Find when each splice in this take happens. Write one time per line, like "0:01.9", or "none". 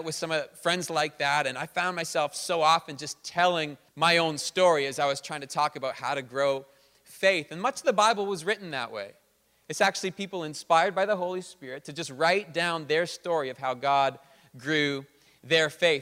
0:03.9